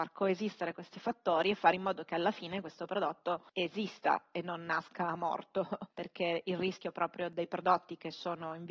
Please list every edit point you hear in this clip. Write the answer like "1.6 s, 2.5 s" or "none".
none